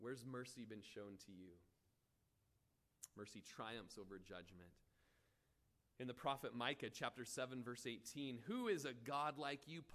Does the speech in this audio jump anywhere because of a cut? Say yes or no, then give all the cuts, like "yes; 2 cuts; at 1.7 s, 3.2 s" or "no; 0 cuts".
no; 0 cuts